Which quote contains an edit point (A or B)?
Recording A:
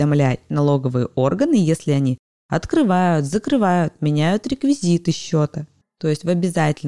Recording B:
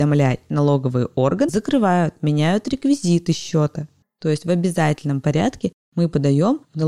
B